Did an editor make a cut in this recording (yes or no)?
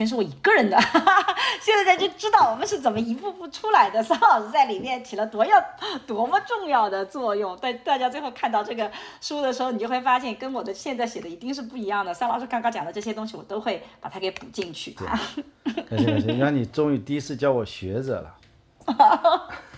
yes